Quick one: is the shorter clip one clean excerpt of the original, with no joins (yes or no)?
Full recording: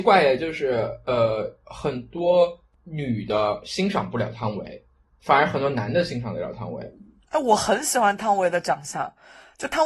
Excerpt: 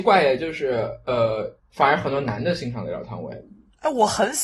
no